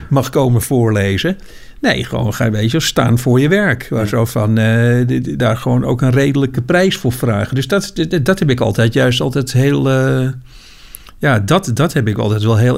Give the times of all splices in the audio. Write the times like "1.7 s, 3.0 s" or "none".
5.4 s